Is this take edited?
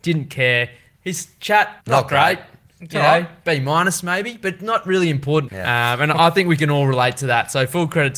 yes; 2 cuts; at 1.8 s, 5.5 s

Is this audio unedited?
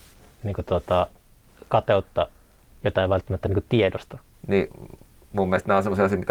no; 1 cut; at 4.3 s

